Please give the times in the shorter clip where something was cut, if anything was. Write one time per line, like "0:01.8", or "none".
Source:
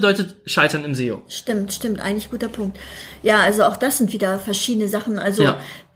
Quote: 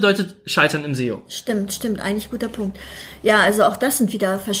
none